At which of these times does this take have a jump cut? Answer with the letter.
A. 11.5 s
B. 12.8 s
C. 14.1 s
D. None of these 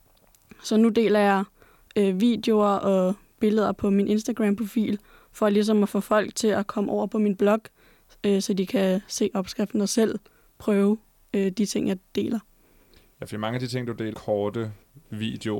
C